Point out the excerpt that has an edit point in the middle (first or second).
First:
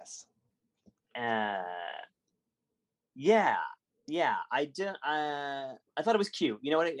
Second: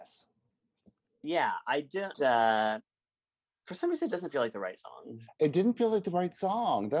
second